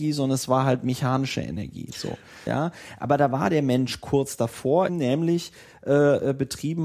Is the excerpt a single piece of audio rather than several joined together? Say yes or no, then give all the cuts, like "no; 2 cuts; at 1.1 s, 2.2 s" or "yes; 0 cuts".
no; 2 cuts; at 2.5 s, 4.9 s